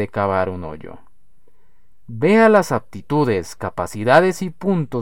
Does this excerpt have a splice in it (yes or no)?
no